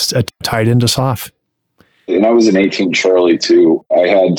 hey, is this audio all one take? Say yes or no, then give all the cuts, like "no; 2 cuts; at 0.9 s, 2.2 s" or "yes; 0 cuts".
yes; 0 cuts